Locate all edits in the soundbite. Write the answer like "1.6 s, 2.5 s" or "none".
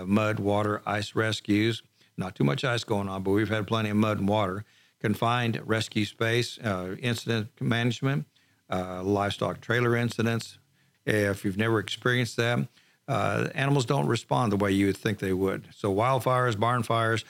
10.9 s